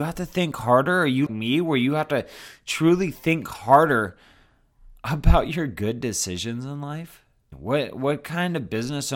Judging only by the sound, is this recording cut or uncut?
cut